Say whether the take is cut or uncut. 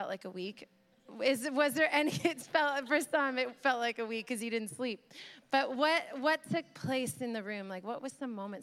uncut